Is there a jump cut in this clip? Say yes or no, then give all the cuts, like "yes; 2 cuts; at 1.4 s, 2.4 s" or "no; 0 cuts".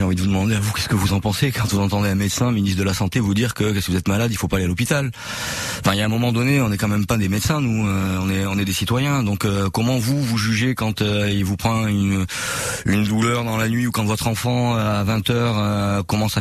no; 0 cuts